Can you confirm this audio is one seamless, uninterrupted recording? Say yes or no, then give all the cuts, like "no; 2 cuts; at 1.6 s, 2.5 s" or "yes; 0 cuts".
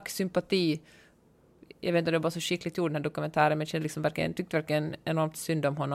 yes; 0 cuts